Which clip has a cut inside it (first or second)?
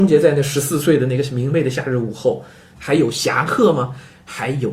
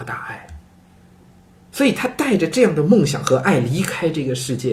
first